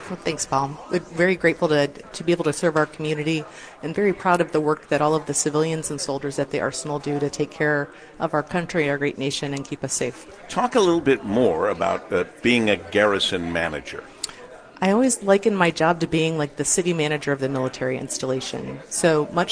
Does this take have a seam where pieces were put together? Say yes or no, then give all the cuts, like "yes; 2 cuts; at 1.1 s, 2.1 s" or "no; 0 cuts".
no; 0 cuts